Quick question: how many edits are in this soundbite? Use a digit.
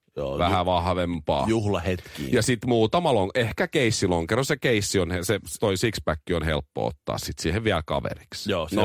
1